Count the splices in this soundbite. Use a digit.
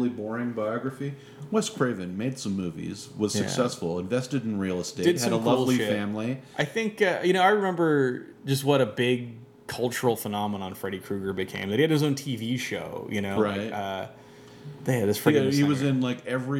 0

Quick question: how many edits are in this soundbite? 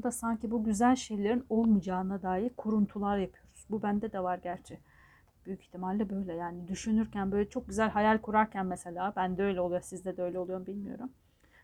0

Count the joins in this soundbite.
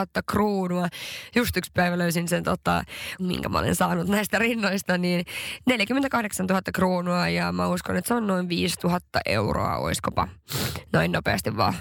1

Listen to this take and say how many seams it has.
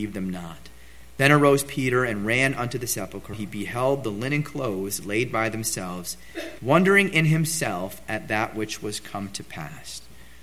2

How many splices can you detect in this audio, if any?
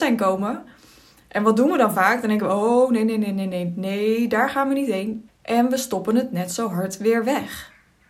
1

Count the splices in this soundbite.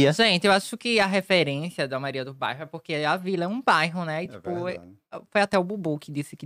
0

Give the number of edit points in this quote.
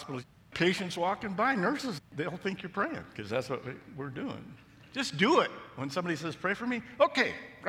1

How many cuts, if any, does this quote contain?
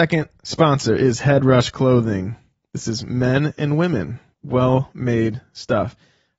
1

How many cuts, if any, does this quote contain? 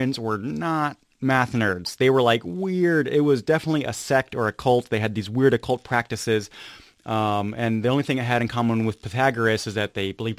0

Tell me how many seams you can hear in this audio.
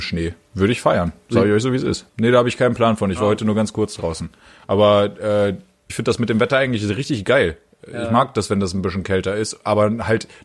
2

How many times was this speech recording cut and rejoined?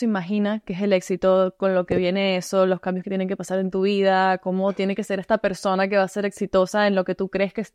0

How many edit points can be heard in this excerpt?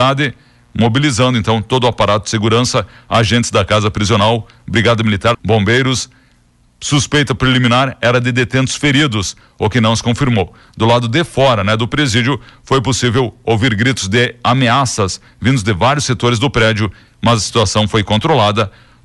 1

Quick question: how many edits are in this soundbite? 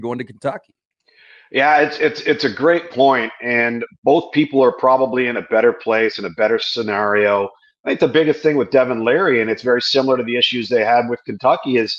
0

